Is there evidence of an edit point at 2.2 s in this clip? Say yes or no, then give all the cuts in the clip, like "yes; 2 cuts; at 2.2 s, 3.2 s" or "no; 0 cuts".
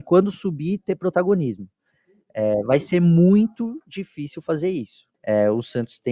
no; 1 cut; at 5.1 s